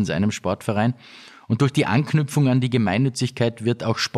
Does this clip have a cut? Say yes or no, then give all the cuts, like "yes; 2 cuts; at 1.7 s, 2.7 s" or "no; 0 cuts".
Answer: no; 0 cuts